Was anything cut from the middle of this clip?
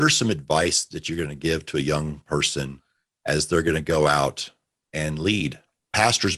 no; 0 cuts

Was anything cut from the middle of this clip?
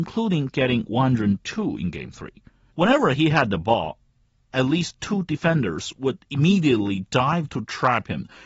yes; 2 cuts; at 2.7 s, 4.5 s

